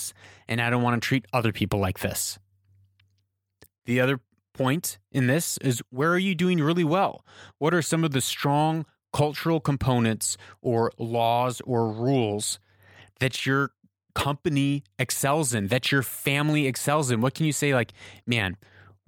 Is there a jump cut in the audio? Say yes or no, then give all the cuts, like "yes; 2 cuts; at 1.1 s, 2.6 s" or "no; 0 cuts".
no; 0 cuts